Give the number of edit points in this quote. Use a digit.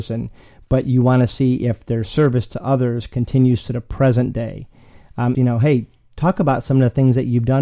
1